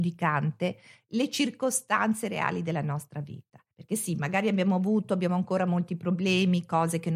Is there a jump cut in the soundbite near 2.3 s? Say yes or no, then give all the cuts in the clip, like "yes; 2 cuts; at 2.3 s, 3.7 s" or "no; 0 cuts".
no; 1 cut; at 3.7 s